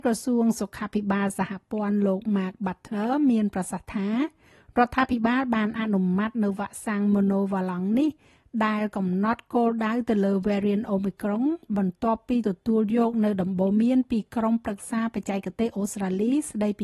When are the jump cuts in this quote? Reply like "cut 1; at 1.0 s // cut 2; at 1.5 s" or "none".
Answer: none